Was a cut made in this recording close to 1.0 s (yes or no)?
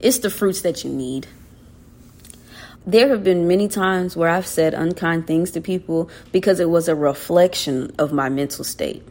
no